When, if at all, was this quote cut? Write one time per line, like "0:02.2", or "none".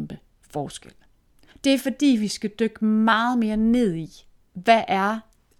0:01.5